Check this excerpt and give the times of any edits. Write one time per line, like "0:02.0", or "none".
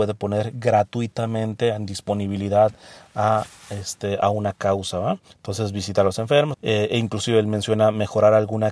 0:05.3
0:06.5